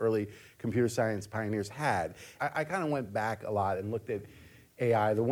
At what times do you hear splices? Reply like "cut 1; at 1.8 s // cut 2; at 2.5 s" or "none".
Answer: cut 1; at 2.4 s